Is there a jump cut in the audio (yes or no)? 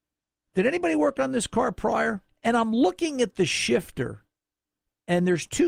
yes